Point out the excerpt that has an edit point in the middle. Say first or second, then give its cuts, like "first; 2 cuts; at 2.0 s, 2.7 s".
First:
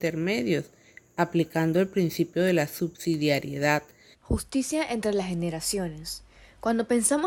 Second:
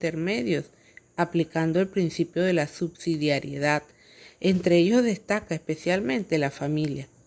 first; 1 cut; at 4.1 s